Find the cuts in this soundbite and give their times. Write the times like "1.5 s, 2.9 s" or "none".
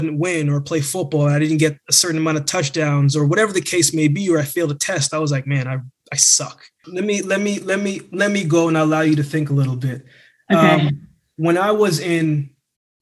6.8 s